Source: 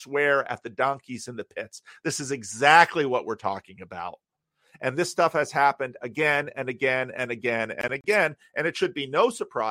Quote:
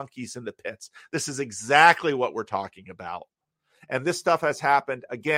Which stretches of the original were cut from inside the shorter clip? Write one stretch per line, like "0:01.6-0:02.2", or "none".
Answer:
none